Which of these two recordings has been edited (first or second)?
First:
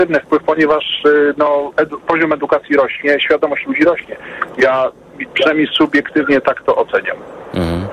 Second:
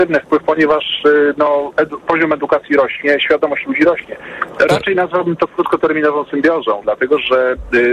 second